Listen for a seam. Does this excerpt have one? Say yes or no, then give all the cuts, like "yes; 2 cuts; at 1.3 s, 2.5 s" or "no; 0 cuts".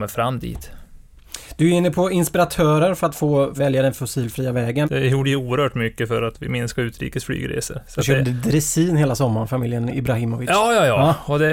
yes; 2 cuts; at 3.6 s, 4.8 s